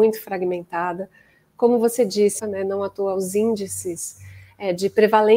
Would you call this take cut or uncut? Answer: cut